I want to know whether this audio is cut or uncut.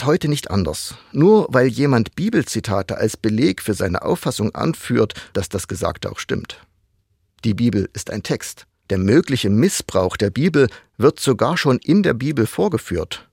cut